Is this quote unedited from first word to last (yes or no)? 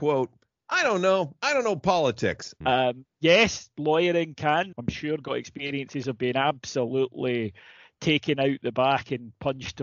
no